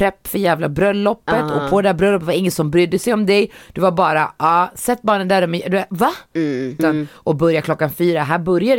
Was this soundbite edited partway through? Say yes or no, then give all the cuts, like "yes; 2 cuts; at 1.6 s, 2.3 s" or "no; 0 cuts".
yes; 1 cut; at 6.8 s